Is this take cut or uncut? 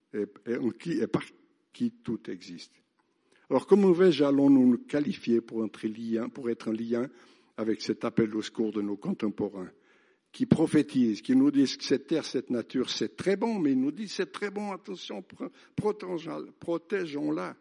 uncut